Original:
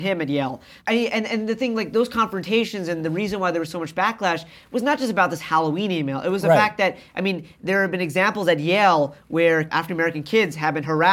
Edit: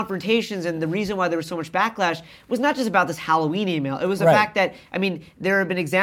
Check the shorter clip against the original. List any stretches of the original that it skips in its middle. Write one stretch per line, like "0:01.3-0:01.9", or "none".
none